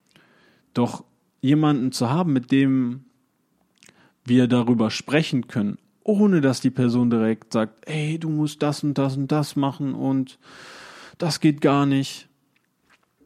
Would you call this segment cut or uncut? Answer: uncut